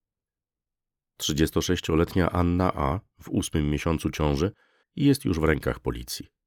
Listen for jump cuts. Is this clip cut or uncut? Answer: cut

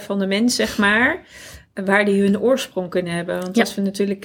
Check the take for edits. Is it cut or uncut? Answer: uncut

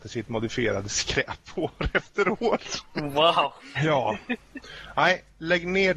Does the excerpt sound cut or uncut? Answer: cut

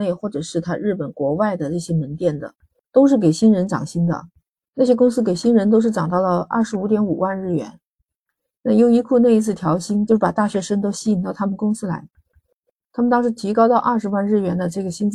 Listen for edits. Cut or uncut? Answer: cut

